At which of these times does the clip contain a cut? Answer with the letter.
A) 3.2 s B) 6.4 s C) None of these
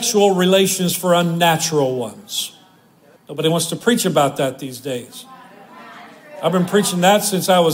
A